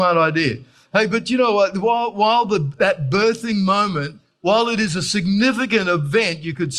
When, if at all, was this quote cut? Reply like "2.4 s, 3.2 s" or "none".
none